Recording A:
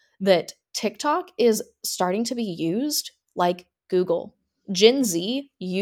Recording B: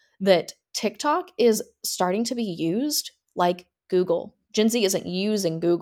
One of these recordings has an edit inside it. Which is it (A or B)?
B